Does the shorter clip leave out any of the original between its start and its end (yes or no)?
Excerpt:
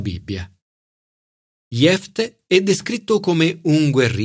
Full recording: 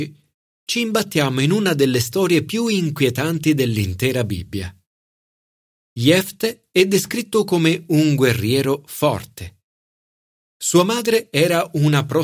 no